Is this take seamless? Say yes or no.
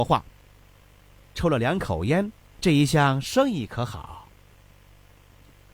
no